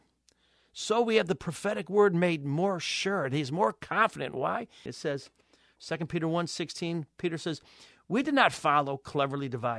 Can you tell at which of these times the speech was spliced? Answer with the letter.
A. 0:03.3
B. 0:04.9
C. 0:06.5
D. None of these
B